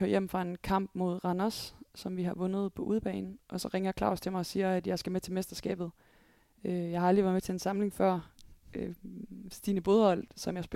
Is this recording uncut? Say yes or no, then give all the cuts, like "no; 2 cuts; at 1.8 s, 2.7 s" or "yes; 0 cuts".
yes; 0 cuts